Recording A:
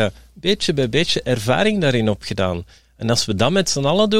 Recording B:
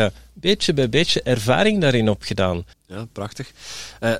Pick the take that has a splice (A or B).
B